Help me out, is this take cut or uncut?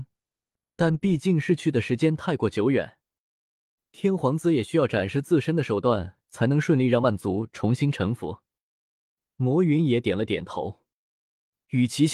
uncut